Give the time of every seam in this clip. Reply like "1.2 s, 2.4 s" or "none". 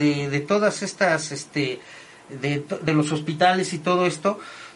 none